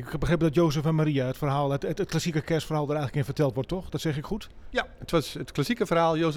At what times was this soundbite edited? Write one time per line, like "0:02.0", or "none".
none